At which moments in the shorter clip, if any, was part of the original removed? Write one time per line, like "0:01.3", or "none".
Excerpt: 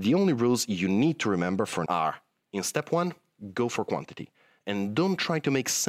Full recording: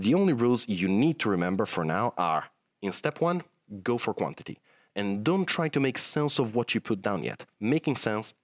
0:01.9

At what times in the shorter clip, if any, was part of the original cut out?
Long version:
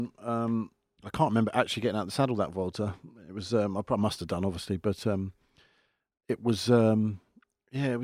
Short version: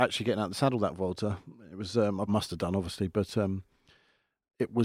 0:02.3

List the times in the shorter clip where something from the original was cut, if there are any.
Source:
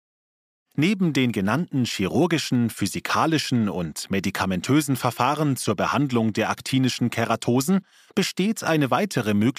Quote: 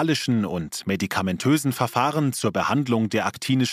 none

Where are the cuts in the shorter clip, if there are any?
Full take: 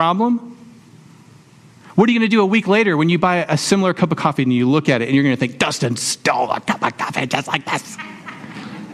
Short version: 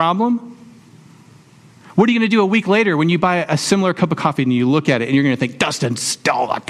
none

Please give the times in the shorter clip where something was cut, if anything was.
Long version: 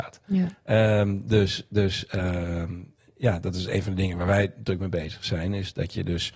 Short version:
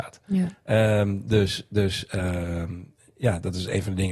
none

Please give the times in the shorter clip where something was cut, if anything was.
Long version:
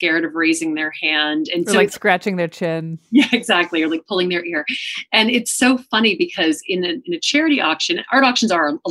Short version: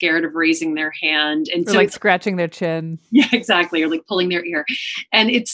none

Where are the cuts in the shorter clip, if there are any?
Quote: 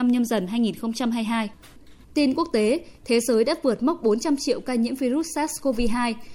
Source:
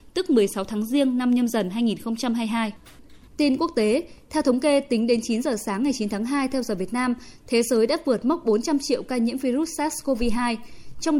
0:03.0

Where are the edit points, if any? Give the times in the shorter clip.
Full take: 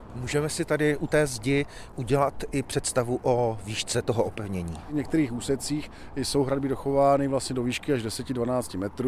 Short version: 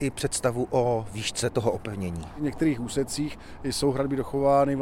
none

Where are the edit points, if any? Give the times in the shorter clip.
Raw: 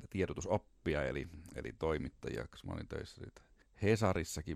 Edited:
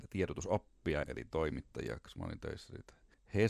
0:01.0

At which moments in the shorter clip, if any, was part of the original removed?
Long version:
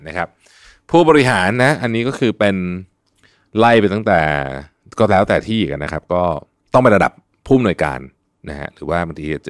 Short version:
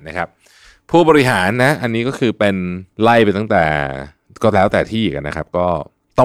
0:02.9

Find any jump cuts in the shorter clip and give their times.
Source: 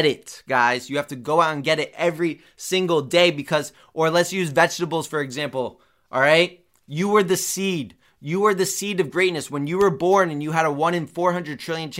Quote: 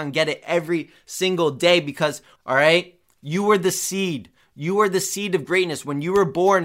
0:02.4

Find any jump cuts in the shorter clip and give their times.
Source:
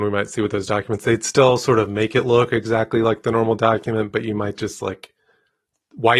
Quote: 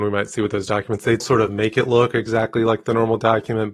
0:01.2

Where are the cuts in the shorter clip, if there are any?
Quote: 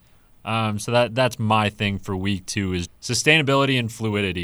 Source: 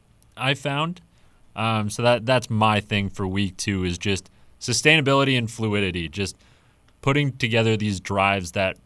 0:02.9

